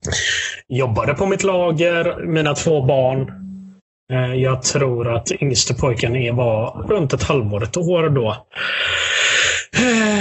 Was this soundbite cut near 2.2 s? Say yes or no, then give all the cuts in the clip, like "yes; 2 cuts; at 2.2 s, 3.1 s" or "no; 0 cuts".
yes; 1 cut; at 2.2 s